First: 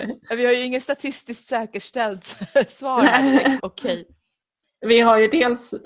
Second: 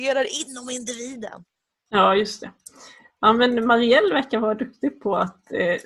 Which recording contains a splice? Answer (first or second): first